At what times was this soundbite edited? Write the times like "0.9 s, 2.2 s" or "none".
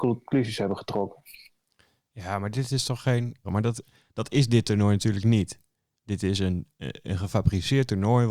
3.4 s